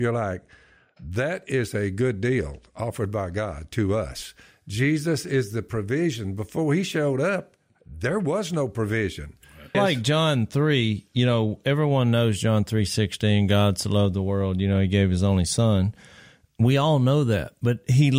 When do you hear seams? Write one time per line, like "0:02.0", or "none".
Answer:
0:09.7